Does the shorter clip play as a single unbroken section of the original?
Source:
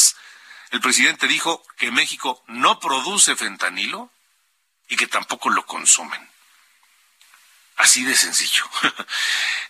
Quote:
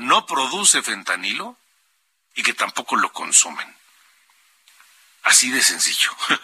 yes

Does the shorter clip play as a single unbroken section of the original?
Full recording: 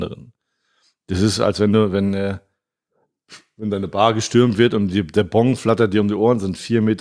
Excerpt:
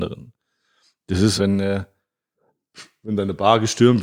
no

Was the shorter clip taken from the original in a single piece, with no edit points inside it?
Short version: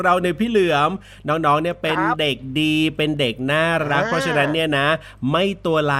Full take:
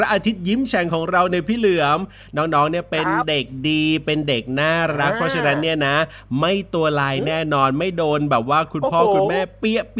yes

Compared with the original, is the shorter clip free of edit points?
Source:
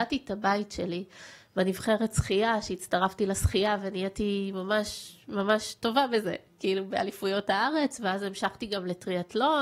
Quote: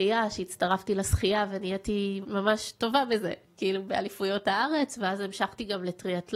no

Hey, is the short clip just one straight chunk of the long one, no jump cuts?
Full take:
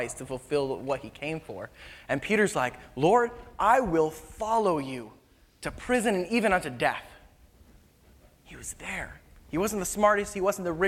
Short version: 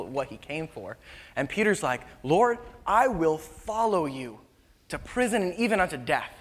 yes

